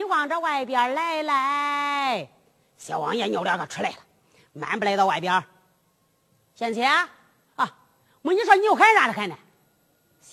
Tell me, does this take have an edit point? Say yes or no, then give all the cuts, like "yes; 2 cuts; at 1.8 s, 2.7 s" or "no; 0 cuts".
no; 0 cuts